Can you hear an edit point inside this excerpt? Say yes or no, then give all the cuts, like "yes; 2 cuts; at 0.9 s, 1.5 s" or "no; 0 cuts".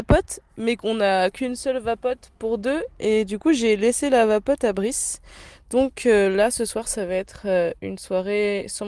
no; 0 cuts